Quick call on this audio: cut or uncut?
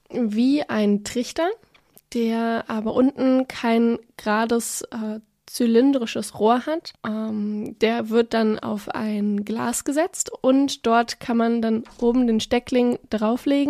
cut